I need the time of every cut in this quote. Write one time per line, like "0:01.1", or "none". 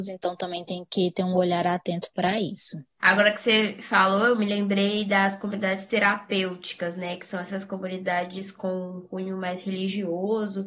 0:03.0